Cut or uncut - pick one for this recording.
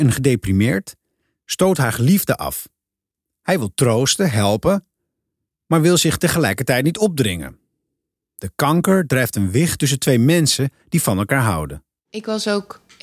uncut